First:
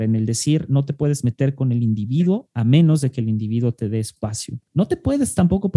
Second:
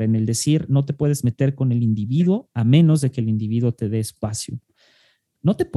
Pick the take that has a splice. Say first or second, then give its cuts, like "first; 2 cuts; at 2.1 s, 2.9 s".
first; 1 cut; at 4.7 s